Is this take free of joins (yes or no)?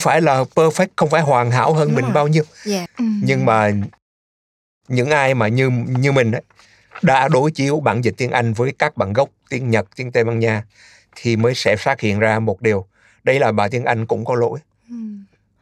no